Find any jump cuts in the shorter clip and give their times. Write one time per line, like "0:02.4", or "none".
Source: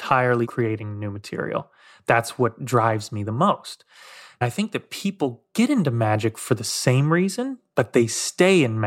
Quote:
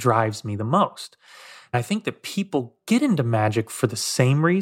none